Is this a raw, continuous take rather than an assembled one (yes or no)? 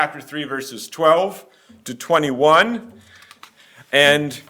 yes